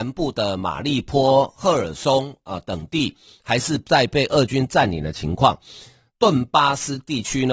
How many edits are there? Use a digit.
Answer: 1